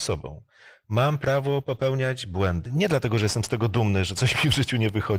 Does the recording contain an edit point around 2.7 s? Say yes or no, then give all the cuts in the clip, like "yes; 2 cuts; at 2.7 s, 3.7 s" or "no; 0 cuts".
yes; 1 cut; at 2.7 s